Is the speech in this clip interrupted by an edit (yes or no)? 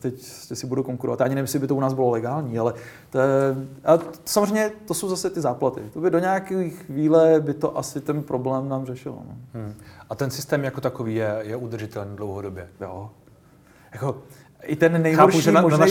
no